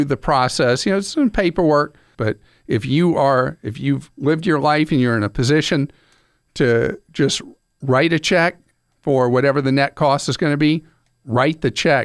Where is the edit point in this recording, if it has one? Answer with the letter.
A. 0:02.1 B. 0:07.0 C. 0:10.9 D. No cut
A